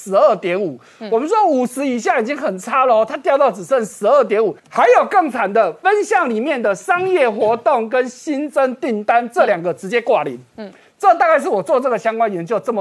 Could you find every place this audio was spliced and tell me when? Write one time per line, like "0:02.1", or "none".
0:04.6

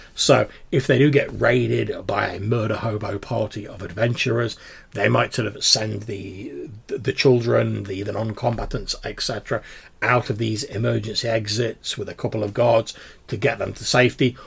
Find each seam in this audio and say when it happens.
none

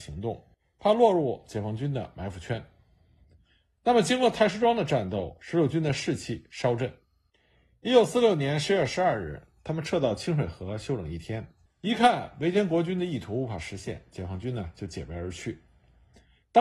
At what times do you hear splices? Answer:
0:11.7

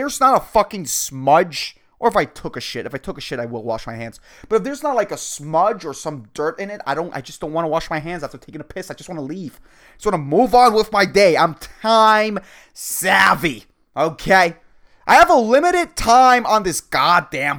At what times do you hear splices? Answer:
none

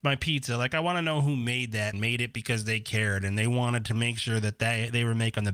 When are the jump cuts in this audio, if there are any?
0:01.9

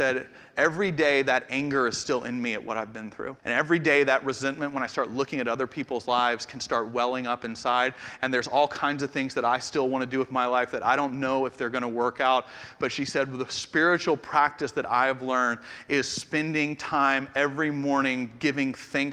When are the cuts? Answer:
0:03.4
0:08.2

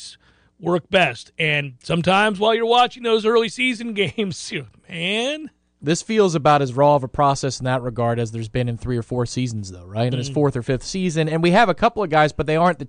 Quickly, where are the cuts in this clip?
0:10.1

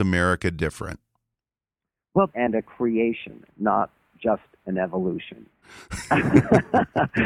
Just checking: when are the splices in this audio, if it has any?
0:02.3
0:05.6

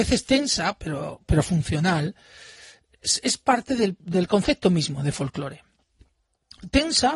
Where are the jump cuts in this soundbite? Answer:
0:04.0

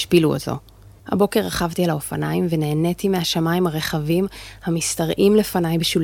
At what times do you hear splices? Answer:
0:01.0

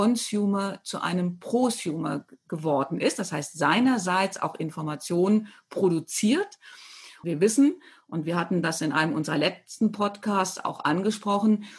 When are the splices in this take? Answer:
0:07.2

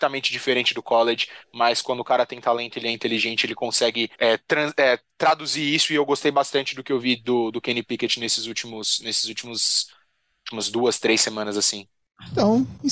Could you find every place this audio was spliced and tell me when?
0:04.1

